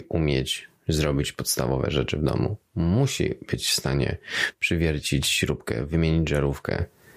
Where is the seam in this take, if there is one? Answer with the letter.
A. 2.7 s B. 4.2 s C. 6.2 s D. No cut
D